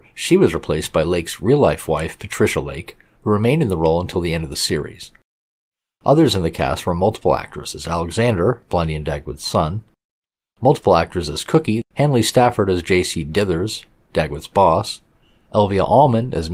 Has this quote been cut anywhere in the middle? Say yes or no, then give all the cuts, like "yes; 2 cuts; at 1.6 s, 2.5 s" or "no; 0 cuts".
yes; 1 cut; at 11.8 s